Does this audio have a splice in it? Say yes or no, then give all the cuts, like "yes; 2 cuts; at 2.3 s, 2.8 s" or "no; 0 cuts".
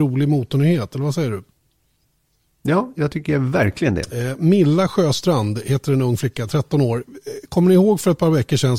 no; 0 cuts